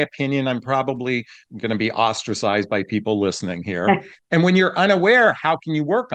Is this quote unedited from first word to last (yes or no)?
no